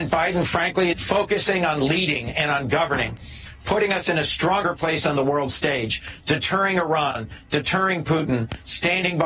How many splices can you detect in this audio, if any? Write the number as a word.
one